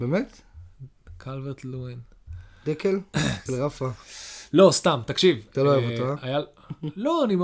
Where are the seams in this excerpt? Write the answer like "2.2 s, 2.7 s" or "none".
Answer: 3.5 s